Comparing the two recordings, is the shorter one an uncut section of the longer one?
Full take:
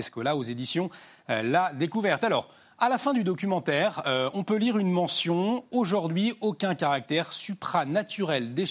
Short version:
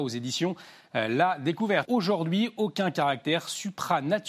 no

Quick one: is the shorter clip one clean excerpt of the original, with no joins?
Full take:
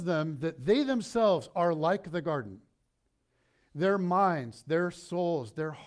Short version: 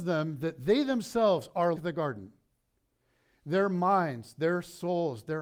no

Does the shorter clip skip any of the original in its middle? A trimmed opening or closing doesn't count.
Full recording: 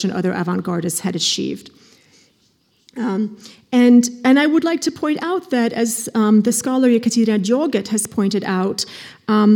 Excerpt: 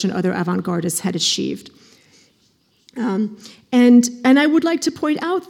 no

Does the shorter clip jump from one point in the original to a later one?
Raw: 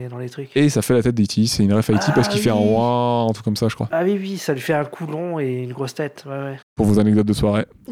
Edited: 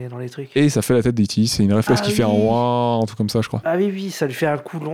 yes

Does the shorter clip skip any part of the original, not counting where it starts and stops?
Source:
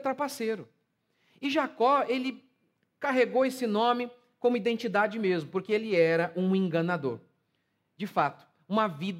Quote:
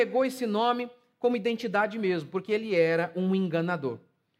no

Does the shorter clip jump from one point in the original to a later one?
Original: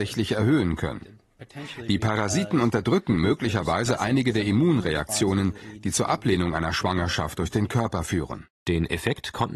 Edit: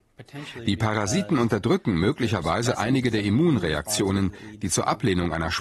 no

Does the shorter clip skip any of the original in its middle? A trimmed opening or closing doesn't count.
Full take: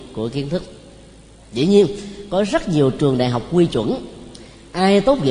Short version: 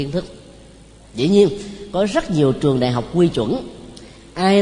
no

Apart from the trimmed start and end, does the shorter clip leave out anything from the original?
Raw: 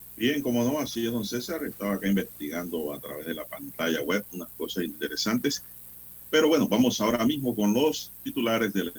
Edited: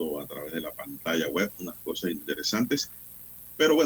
no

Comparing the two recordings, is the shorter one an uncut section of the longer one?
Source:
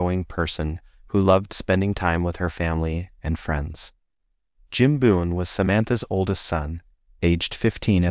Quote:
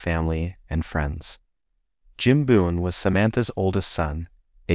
yes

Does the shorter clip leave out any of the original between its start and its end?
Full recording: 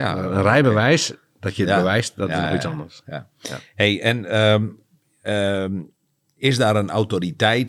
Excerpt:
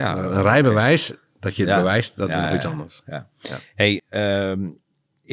yes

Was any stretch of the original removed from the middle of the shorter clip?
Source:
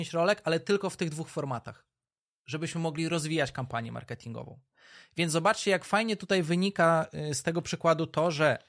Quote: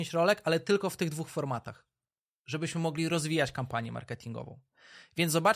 no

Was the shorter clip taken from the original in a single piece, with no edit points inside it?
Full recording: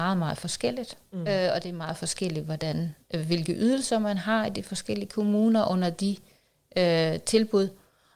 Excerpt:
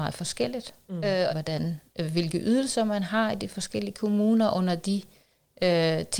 no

